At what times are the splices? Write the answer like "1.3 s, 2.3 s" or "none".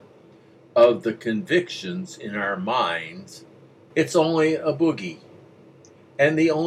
3.9 s